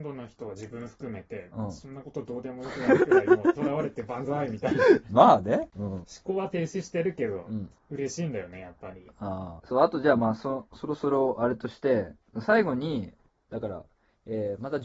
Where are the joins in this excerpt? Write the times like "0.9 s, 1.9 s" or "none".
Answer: none